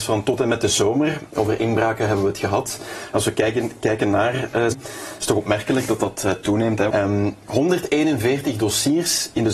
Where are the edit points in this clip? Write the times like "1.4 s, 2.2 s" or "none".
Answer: 4.7 s, 6.9 s